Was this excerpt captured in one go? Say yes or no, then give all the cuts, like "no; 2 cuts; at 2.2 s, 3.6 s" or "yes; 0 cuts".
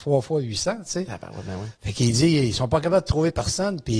yes; 0 cuts